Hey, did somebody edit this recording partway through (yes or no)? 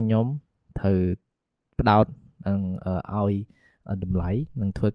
no